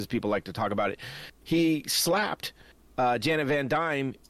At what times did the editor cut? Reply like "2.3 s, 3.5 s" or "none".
none